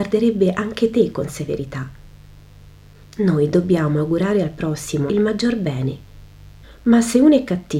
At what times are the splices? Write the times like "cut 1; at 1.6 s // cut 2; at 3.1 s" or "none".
cut 1; at 5.1 s // cut 2; at 6.6 s